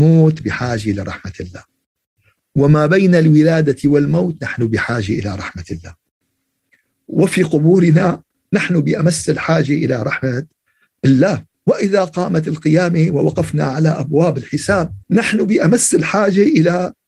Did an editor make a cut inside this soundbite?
yes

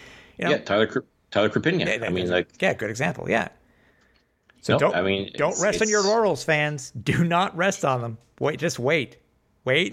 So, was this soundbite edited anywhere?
no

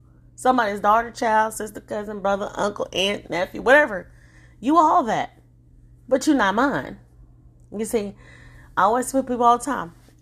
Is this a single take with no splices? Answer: yes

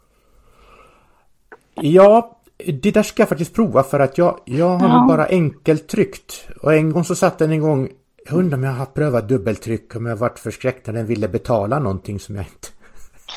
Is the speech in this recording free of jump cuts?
yes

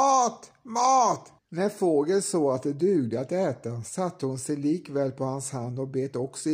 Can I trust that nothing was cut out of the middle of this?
no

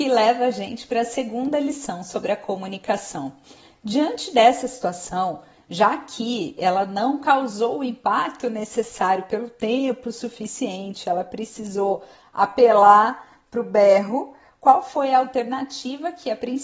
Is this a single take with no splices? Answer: yes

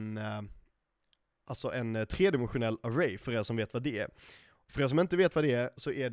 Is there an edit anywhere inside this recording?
no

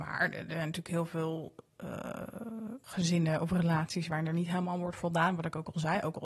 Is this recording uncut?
no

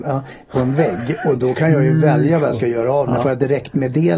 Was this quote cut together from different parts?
no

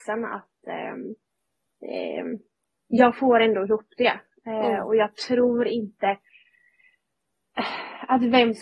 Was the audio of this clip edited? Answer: no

